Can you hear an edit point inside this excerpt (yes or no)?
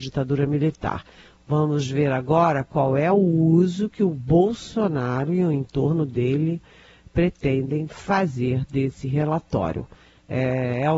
no